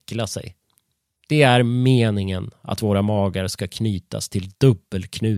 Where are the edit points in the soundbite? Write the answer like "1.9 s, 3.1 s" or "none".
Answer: 1.2 s